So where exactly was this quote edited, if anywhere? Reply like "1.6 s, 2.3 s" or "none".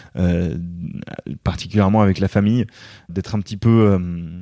3.1 s